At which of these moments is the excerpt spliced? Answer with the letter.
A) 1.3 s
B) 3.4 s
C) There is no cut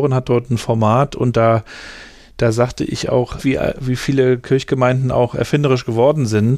B